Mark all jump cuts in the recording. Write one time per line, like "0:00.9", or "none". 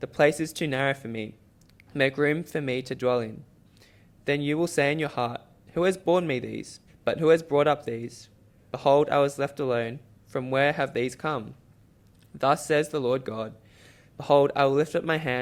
0:06.9